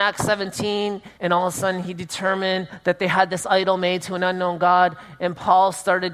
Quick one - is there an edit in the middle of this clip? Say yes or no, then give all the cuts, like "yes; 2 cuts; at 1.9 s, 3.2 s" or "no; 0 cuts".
yes; 1 cut; at 1.2 s